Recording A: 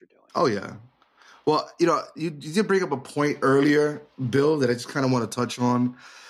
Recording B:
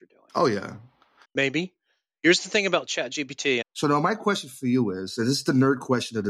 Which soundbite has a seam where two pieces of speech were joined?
B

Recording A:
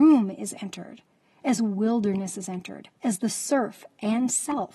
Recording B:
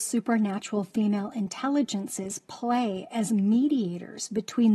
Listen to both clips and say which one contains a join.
A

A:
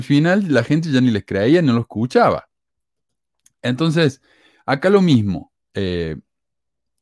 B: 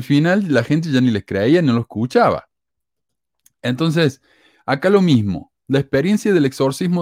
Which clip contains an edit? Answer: A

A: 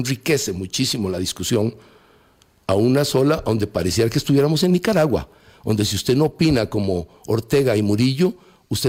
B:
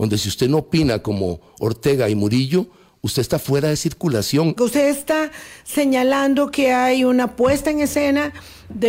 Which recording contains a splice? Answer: B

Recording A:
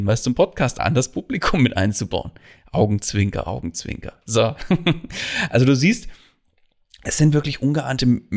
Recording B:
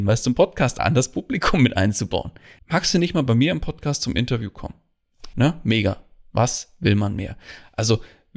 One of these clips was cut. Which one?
B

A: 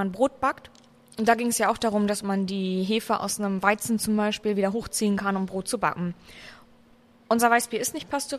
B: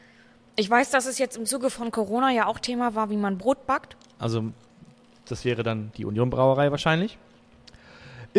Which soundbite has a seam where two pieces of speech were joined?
B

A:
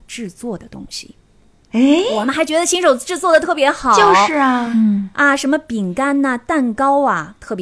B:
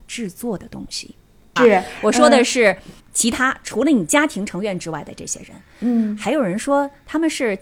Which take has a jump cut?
B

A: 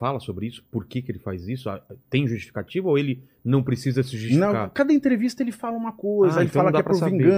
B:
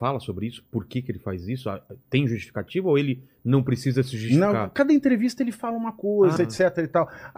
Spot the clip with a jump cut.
B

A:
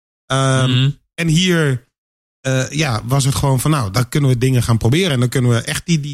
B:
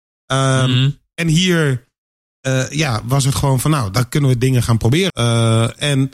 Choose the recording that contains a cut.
B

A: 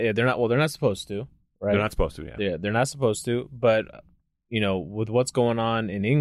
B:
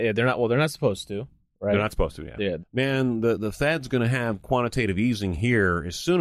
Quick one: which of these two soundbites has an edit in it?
B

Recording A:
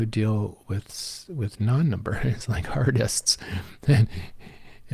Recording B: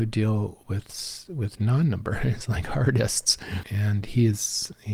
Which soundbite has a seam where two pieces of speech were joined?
B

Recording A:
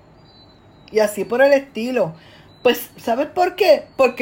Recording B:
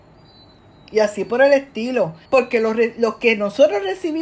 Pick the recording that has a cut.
B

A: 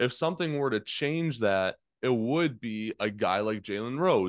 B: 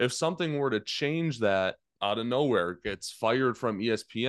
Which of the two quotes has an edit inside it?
B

